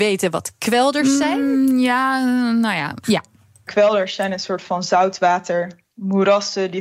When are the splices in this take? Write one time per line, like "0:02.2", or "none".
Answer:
0:03.0